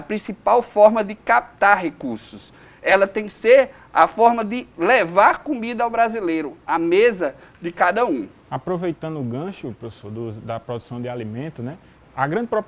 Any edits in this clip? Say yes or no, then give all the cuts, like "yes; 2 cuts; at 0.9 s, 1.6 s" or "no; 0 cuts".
no; 0 cuts